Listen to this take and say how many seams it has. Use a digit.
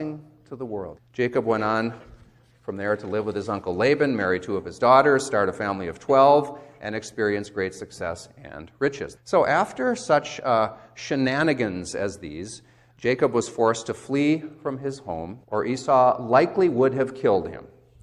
3